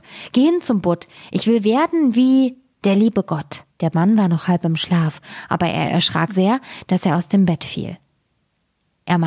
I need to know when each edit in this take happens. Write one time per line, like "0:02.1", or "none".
0:03.7
0:06.3